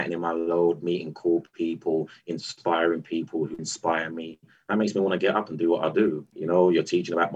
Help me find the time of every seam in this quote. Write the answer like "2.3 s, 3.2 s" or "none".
3.6 s, 6.3 s